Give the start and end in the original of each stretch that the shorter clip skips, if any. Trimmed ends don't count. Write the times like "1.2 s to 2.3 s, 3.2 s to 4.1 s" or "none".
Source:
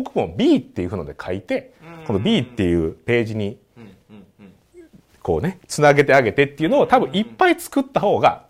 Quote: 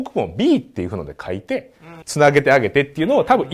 2.0 s to 5.6 s